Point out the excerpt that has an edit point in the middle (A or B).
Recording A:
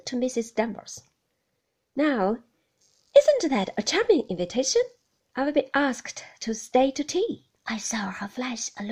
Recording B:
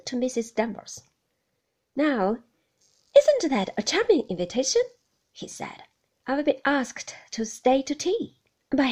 A